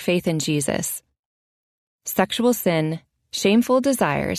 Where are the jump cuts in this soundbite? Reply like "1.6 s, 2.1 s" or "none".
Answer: none